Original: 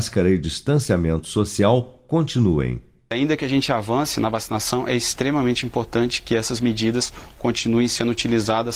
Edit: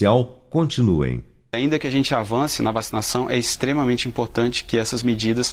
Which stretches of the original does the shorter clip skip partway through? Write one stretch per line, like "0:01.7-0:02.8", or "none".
none